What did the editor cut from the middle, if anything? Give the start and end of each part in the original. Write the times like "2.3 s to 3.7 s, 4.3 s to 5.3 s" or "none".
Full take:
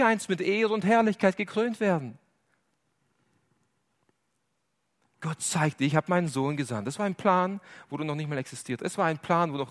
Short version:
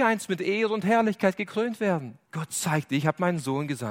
2.2 s to 5.1 s

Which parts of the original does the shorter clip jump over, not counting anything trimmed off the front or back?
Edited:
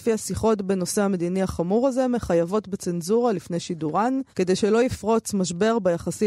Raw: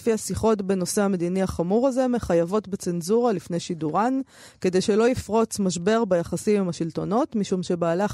4.3 s to 4.6 s

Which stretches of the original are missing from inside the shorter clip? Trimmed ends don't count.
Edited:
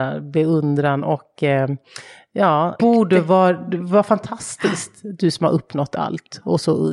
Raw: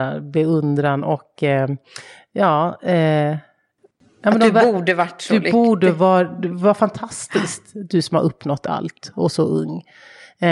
2.8 s to 5.5 s

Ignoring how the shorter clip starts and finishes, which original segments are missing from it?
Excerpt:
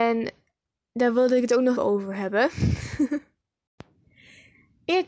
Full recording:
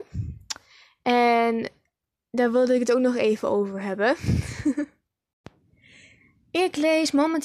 3.1 s to 3.4 s

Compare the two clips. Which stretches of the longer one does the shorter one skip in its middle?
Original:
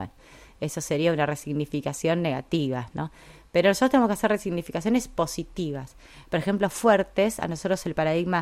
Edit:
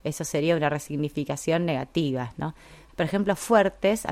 3.5 s to 6.2 s

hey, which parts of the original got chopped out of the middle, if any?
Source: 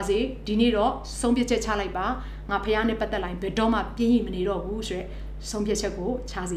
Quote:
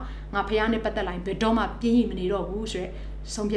none

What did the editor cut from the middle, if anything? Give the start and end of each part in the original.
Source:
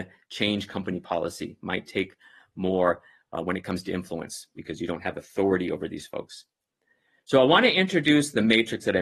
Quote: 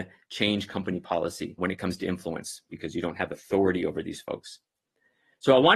1.6 s to 3.4 s

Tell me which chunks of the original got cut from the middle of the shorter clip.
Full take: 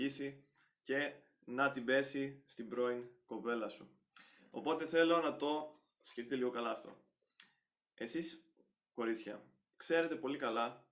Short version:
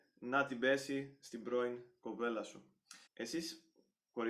4.3 s to 7.9 s

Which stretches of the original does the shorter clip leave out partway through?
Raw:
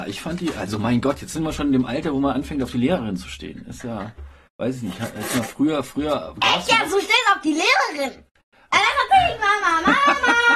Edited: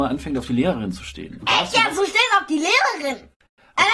3.6 s to 6.3 s

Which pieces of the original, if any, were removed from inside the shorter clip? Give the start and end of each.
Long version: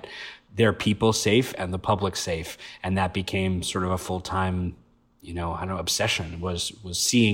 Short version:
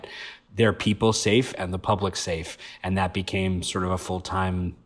none

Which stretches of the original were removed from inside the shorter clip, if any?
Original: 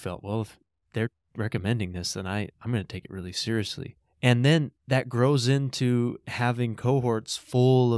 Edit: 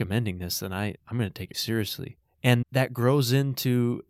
3.1 s to 3.3 s, 4.4 s to 4.8 s

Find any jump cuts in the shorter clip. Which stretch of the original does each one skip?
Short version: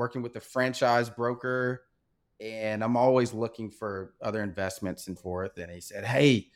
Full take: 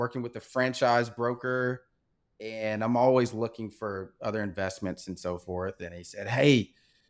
5.2 s to 5.4 s

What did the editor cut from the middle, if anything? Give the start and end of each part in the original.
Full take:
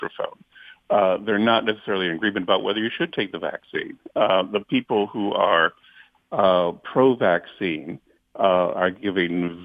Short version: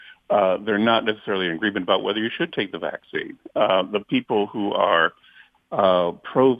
none

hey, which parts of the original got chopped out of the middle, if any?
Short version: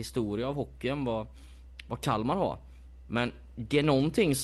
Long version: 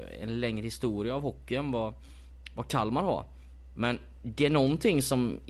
none

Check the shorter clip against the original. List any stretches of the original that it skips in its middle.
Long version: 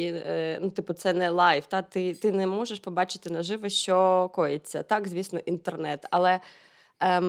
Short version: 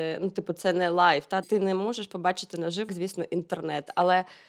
1.8 s to 2.1 s, 3.6 s to 5.0 s

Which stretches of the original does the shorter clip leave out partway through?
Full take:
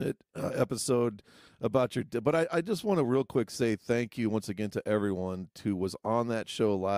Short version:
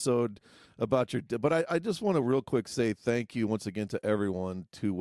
none

